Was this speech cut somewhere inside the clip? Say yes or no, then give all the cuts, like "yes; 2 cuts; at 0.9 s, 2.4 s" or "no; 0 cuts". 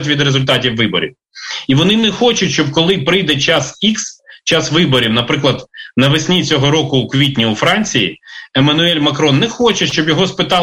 no; 0 cuts